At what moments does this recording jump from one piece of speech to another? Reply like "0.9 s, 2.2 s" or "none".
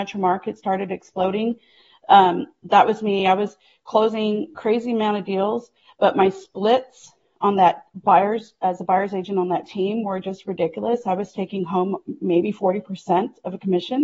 none